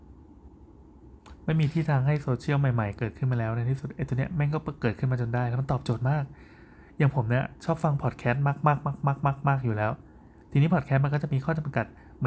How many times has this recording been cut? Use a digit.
0